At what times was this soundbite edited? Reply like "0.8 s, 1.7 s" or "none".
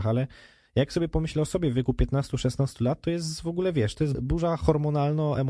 4.1 s